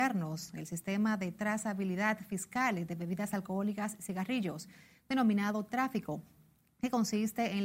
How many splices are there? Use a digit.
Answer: 0